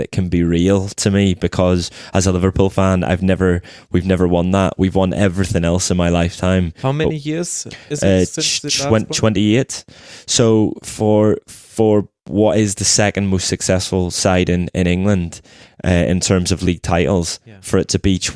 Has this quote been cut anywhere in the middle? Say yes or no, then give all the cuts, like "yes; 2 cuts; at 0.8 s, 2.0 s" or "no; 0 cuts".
no; 0 cuts